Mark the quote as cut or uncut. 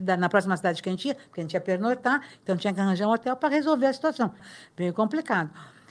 cut